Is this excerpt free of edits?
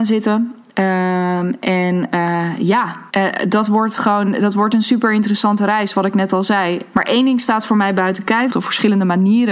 no; 3 cuts; at 3.1 s, 6.9 s, 8.5 s

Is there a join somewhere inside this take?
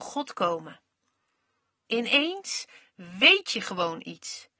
yes; 1 cut; at 1.9 s

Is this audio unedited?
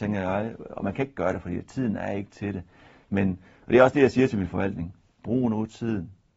yes; 0 cuts

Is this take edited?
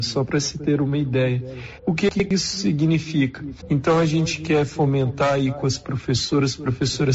yes; 2 cuts; at 1.8 s, 3.6 s

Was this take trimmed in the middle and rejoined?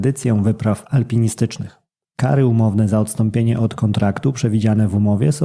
yes; 1 cut; at 2.0 s

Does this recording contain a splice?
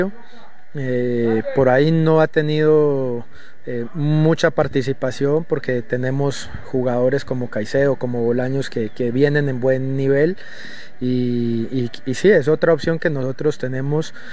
no; 0 cuts

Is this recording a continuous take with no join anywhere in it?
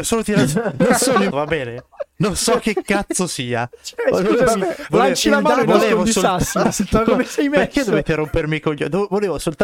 no; 1 cut; at 1.3 s

